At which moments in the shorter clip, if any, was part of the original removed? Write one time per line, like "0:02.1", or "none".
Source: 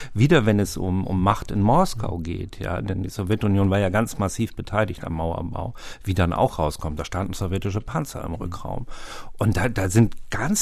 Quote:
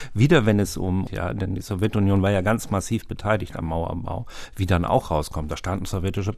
0:01.1